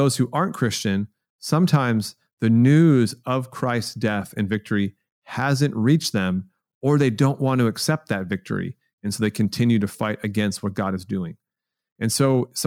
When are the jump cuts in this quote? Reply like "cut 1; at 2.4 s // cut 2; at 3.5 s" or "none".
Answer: none